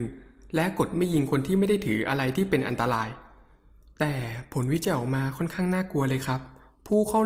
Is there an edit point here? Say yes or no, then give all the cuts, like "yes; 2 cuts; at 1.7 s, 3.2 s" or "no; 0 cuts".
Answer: no; 0 cuts